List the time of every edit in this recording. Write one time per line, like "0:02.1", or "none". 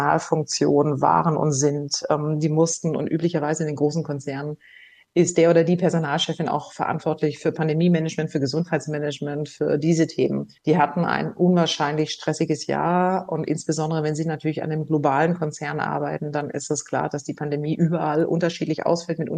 0:10.6